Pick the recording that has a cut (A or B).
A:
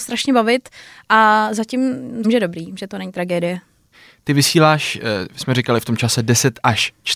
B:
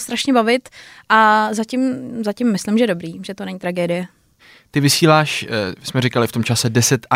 A